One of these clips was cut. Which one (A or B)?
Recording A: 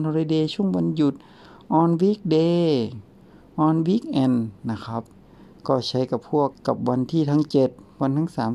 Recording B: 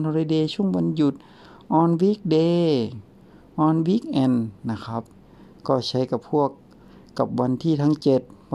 A